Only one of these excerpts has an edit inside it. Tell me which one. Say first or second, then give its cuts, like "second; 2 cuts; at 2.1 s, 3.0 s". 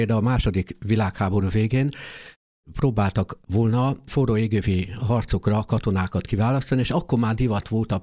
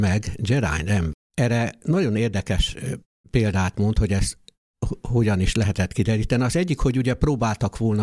second; 1 cut; at 1.1 s